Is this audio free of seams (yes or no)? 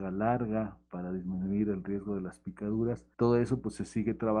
no